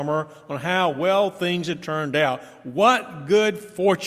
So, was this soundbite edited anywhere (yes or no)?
no